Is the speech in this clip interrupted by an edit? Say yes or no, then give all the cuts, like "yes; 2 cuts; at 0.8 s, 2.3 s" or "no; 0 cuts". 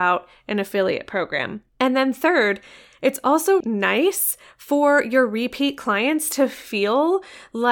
yes; 2 cuts; at 1.7 s, 3.6 s